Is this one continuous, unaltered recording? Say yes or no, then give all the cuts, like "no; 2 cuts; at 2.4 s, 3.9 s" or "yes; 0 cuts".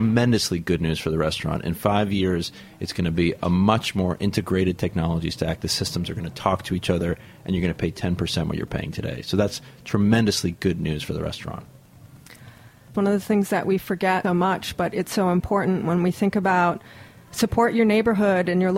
no; 2 cuts; at 12.9 s, 14.2 s